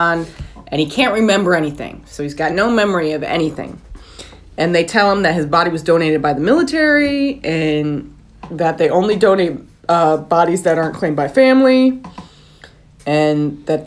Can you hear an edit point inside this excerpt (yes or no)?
no